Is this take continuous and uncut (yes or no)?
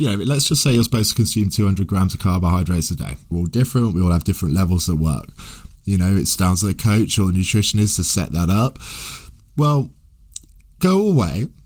no